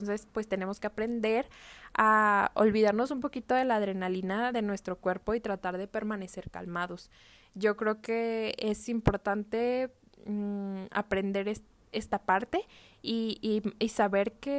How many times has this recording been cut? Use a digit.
0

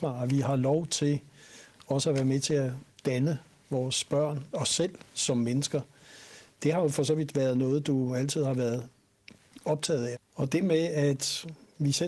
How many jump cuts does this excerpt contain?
1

